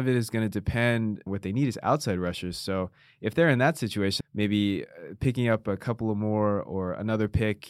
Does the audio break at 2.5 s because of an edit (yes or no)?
no